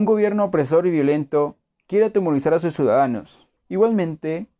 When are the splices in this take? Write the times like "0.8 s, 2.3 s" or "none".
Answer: 3.6 s